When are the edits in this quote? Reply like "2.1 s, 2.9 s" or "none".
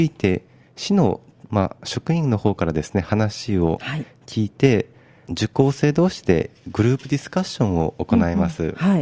5.3 s